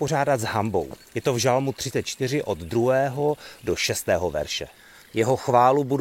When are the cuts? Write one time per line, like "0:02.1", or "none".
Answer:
0:05.0